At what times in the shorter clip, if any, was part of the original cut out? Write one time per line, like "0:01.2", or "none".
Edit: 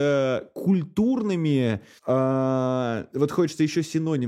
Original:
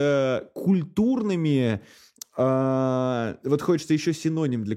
0:02.0